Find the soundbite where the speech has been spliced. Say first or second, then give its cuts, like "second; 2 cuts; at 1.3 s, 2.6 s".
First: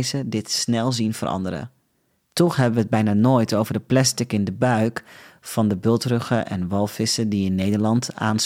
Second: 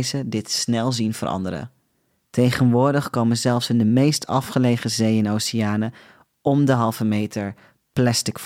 first; 1 cut; at 2.3 s